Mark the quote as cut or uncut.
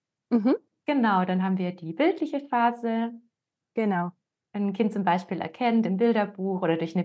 uncut